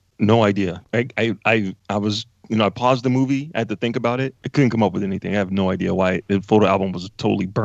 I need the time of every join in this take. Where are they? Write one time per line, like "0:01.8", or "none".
none